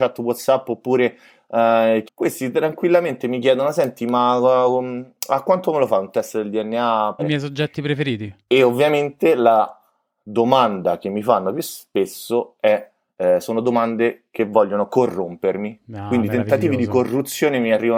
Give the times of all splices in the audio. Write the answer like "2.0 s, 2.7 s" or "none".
2.1 s, 7.2 s